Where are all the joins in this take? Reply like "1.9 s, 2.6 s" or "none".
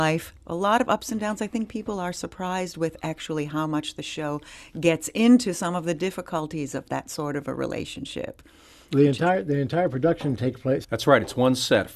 10.8 s